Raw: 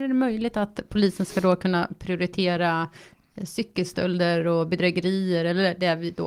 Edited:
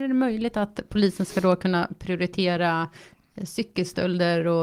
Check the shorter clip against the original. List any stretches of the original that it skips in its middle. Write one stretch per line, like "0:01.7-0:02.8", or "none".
none